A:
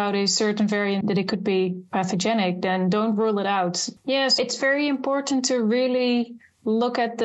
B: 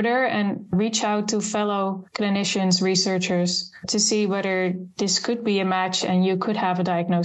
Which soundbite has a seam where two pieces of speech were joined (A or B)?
A